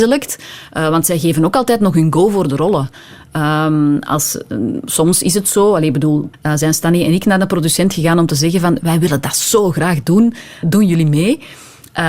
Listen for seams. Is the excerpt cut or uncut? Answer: cut